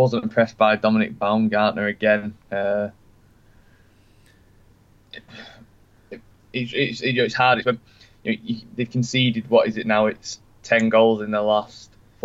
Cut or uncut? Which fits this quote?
uncut